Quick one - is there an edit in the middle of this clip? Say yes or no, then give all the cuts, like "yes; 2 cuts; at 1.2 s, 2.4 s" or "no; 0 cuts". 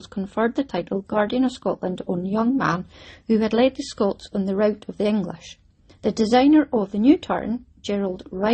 yes; 1 cut; at 5.9 s